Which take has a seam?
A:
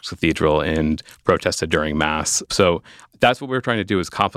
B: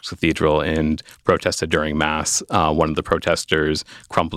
A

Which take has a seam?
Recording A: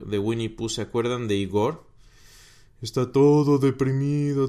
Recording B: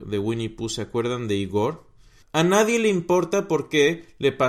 B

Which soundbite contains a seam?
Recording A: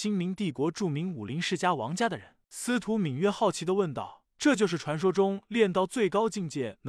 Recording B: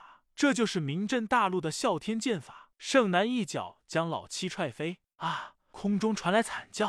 B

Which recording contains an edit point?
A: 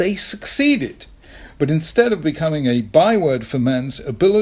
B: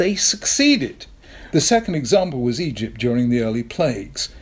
B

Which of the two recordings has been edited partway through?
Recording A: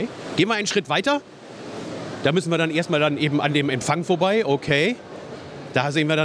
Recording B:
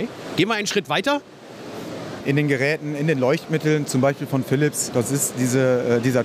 B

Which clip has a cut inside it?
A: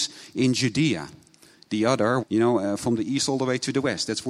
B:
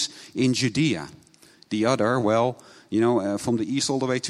A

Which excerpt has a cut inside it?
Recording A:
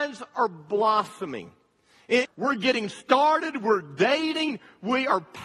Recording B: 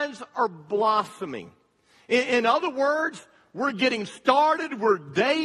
A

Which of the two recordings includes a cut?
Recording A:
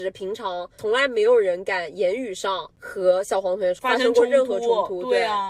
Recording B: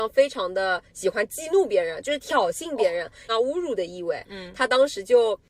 B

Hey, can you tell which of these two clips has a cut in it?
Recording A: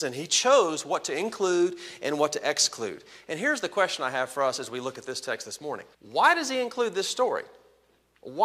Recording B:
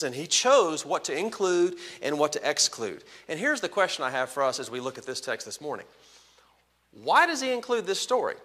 A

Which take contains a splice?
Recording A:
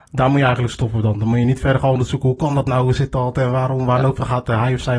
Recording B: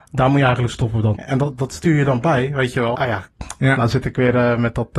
B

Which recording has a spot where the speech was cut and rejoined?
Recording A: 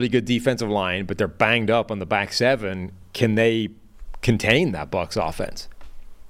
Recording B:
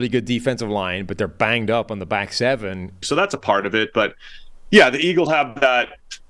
B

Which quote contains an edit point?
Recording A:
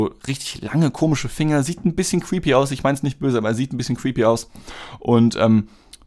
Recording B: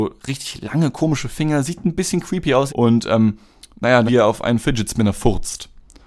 B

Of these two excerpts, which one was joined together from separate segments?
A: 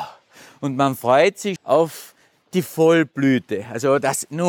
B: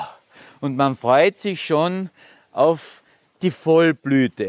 A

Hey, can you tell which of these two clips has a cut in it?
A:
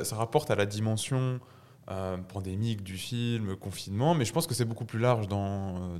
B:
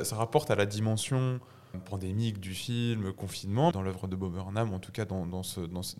B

